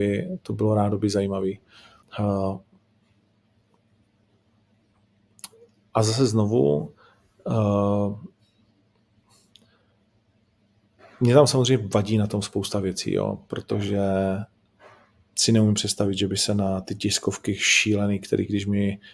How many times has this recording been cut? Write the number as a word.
one